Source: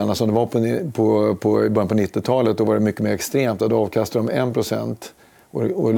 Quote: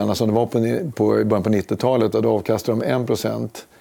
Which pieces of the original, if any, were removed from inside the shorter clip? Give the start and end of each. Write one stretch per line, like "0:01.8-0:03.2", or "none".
0:00.9-0:01.4
0:02.6-0:03.6